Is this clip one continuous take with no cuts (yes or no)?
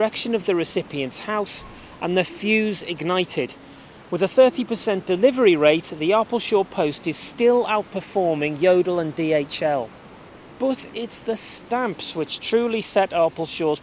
yes